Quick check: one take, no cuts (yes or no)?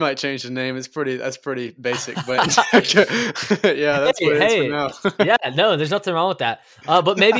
yes